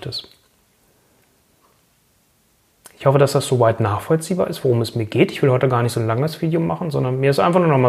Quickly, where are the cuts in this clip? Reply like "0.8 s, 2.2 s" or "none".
none